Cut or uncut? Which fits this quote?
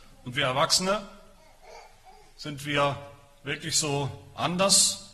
uncut